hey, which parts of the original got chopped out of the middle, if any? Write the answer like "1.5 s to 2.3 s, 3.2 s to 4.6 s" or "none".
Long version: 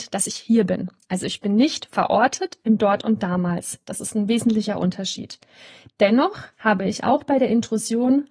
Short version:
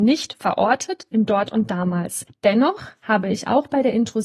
3.8 s to 5.8 s